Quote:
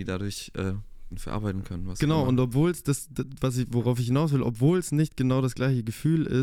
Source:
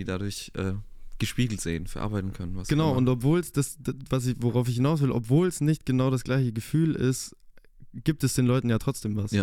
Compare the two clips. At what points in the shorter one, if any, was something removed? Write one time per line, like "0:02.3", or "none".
0:01.1